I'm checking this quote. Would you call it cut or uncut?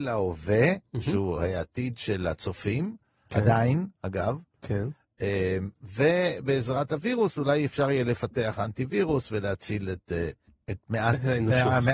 uncut